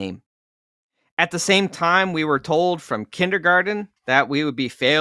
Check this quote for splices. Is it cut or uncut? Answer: cut